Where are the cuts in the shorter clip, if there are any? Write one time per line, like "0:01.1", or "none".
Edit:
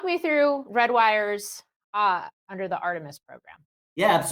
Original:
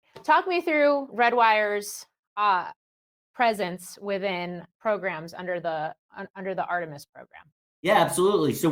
0:02.4